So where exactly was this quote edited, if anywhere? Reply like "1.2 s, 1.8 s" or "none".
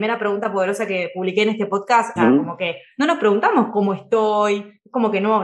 2.2 s